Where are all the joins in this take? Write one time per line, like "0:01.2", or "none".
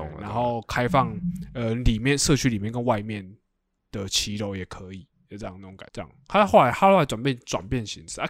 0:05.9